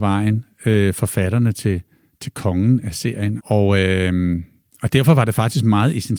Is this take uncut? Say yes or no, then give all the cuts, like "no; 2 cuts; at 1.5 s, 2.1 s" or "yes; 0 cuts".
no; 1 cut; at 3.4 s